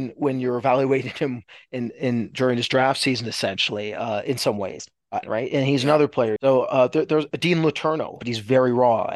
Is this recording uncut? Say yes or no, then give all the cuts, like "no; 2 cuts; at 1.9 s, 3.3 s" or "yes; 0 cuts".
no; 3 cuts; at 5.2 s, 6.4 s, 8.2 s